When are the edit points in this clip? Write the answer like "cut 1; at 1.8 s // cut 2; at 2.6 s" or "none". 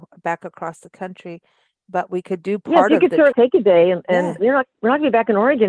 cut 1; at 3.3 s // cut 2; at 4.4 s